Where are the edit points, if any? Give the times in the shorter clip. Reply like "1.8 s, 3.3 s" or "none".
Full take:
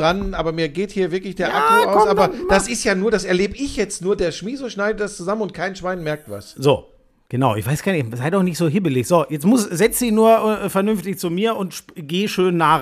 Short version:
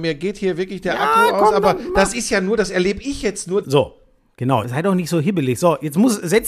3.6 s, 4.6 s